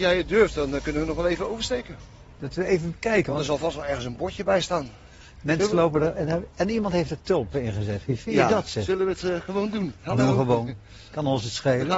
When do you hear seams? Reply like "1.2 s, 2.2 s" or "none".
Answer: none